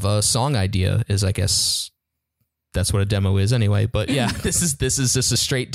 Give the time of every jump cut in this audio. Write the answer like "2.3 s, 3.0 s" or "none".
none